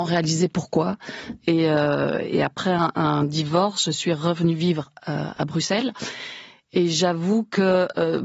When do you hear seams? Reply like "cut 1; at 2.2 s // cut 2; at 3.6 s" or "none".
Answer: cut 1; at 1.4 s